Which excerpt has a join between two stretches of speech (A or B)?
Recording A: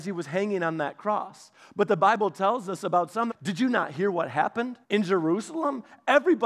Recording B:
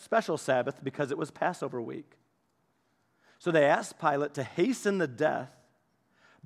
A